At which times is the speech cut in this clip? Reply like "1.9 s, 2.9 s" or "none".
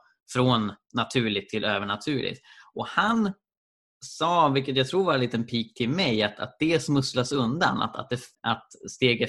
8.3 s